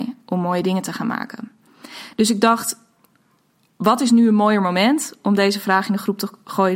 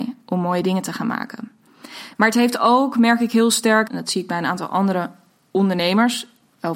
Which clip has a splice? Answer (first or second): second